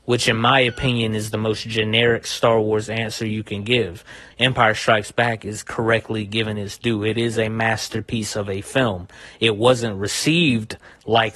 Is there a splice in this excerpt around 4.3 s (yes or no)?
yes